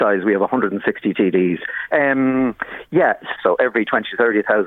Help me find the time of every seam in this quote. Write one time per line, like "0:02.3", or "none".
0:01.9
0:03.3